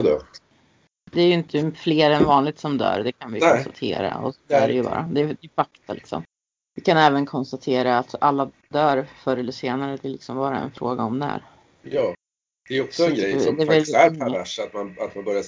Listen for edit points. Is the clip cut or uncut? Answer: uncut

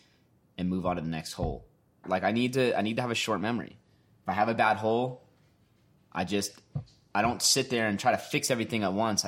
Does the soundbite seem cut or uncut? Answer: cut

